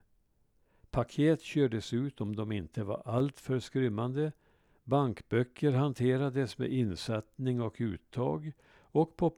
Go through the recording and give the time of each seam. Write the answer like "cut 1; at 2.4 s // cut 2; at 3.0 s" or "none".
none